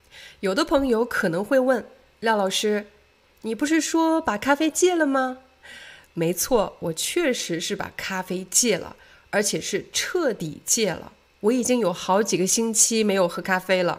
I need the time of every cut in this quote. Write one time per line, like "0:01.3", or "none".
none